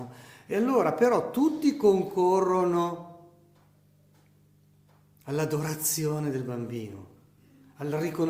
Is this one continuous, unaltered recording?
yes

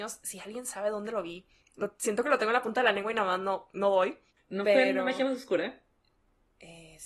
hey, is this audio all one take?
yes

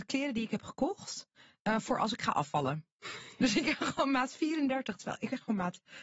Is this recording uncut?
yes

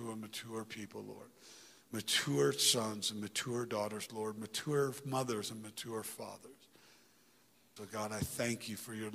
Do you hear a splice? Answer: yes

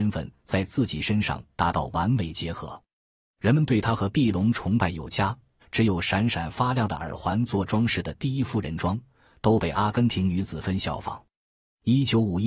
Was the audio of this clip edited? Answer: yes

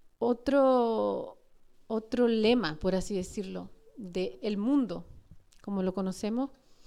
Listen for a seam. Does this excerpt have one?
no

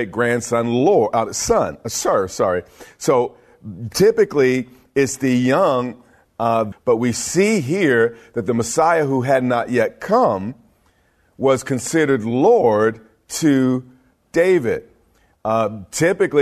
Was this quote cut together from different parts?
yes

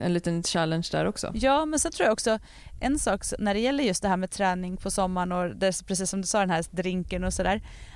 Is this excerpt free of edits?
yes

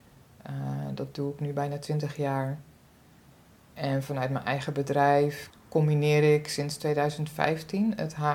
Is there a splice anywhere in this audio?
yes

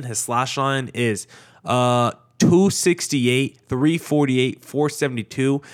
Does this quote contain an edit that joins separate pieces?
no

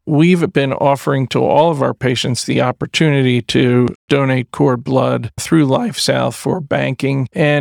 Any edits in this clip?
no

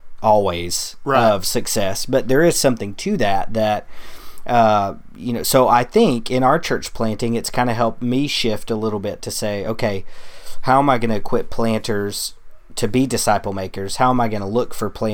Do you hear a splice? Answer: no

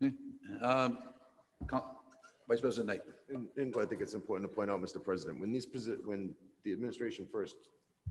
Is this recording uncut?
no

